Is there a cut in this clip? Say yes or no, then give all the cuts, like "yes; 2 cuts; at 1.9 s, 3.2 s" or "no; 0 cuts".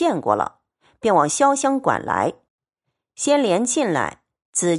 no; 0 cuts